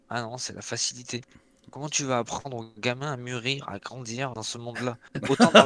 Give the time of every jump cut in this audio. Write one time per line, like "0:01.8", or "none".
0:04.3